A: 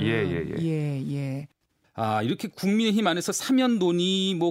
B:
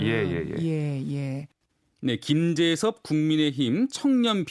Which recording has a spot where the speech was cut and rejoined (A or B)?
A